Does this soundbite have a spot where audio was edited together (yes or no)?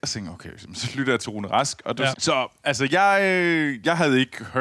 yes